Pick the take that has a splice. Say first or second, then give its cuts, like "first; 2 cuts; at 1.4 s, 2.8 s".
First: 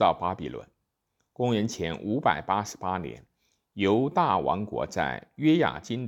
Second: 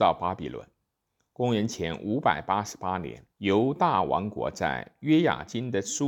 second; 1 cut; at 3.3 s